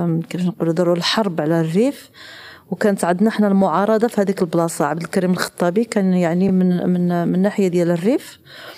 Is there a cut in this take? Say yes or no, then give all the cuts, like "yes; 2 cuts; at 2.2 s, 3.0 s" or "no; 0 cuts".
no; 0 cuts